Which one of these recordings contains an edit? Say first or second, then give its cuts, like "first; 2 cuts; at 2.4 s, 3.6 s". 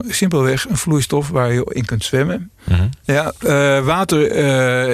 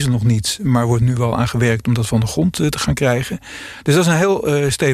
first; 1 cut; at 3.0 s